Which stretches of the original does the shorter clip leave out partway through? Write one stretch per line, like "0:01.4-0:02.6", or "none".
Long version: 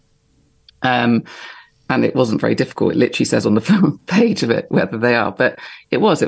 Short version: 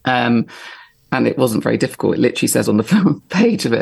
none